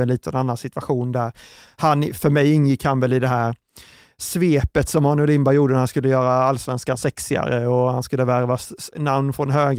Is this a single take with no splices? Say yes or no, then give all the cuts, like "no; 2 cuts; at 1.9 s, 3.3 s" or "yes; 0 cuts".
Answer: yes; 0 cuts